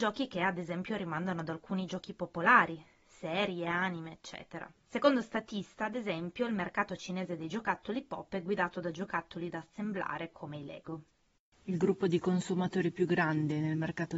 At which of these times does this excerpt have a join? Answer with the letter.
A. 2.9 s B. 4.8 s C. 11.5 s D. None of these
B